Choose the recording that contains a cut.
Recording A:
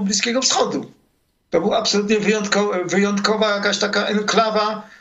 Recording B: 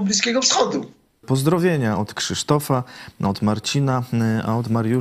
B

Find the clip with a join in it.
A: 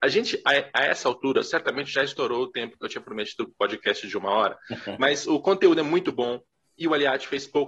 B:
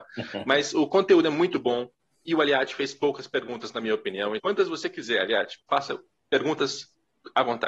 B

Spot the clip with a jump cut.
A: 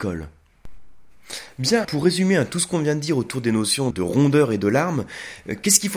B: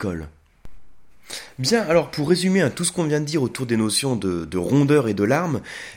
A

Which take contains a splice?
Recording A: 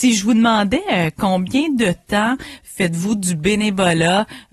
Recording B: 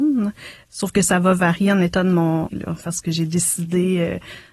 B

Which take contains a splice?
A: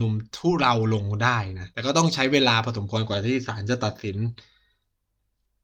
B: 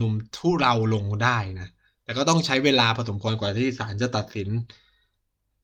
A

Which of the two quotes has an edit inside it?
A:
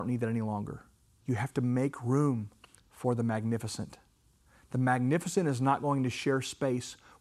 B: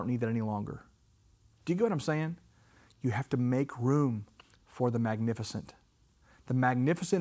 A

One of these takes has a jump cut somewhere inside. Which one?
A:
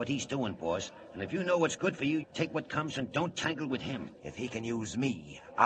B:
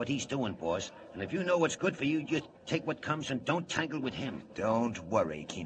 A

